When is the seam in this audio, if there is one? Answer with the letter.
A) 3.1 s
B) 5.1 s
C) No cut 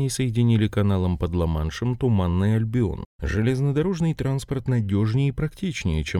A